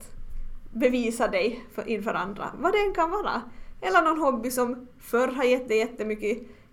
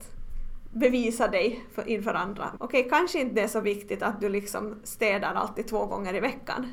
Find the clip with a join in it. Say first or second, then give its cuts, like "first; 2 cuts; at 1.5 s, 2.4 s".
second; 1 cut; at 2.6 s